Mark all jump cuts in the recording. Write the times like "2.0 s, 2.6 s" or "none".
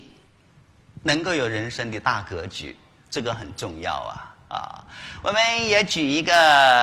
none